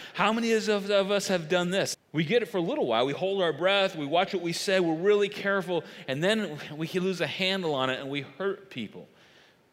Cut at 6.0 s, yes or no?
no